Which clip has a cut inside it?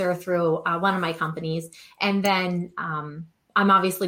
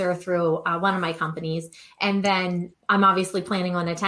second; 1 cut; at 2.7 s

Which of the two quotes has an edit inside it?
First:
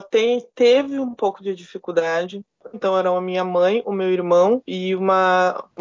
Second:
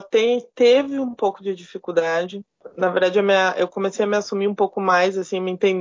first; 1 cut; at 2.7 s

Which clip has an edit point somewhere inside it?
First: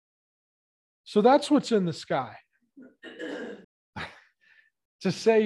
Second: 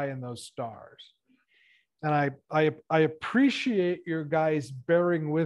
first; 1 cut; at 3.6 s

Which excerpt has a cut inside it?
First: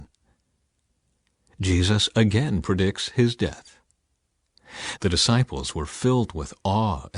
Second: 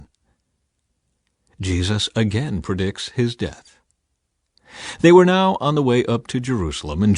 first; 1 cut; at 5.0 s

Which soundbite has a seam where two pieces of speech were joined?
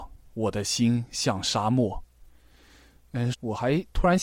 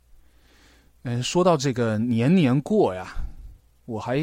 first; 1 cut; at 3.3 s

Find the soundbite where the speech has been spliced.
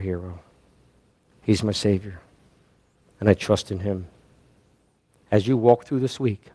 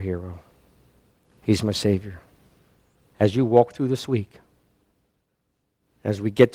second; 1 cut; at 3.0 s

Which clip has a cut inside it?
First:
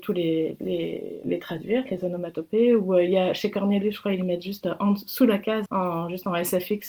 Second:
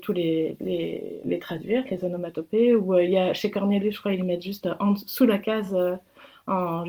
first; 1 cut; at 5.7 s

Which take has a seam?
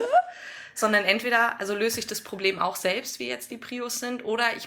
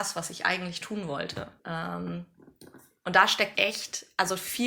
second; 2 cuts; at 1.6 s, 3.5 s

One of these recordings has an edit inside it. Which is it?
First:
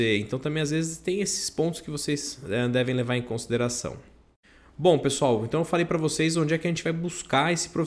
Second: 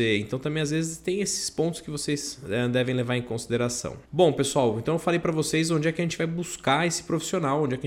second; 1 cut; at 4.0 s

